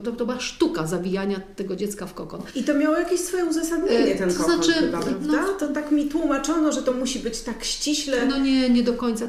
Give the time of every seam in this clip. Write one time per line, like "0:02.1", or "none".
none